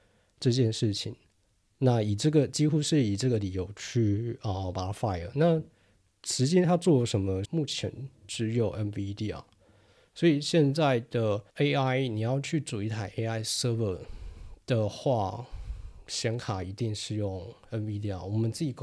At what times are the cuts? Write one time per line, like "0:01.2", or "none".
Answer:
0:07.4
0:11.5